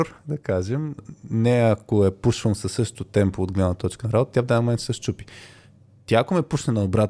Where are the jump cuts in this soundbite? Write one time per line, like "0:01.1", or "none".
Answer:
0:01.0